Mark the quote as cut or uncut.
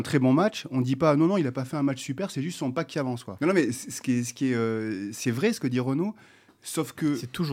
cut